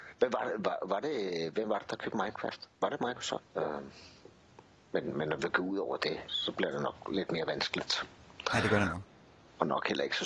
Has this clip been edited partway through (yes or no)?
yes